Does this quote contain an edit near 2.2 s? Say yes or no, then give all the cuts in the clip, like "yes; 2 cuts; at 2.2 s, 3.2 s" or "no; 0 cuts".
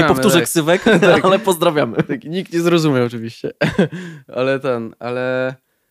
no; 0 cuts